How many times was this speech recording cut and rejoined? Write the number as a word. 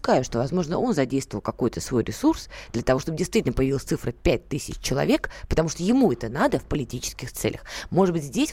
zero